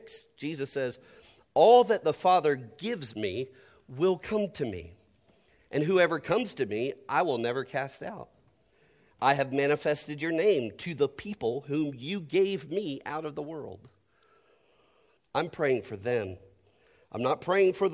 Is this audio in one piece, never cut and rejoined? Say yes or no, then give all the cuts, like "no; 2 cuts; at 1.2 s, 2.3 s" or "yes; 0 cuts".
no; 2 cuts; at 9.1 s, 15.2 s